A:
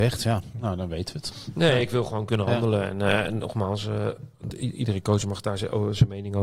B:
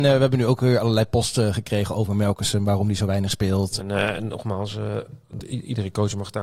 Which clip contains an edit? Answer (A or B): B